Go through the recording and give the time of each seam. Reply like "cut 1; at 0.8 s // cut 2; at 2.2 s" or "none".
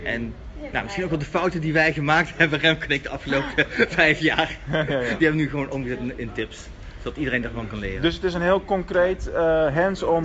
none